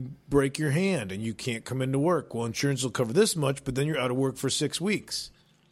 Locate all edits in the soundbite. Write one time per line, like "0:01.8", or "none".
none